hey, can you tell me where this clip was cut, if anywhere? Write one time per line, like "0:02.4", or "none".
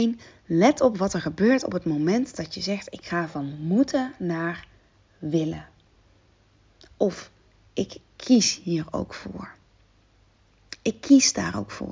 none